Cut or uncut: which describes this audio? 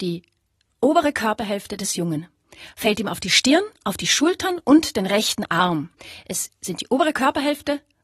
uncut